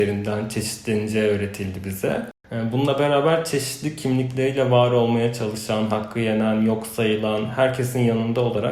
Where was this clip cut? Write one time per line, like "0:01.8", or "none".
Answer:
none